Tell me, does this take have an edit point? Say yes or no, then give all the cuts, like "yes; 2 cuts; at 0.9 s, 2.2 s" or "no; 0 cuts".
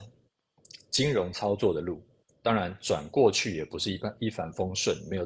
no; 0 cuts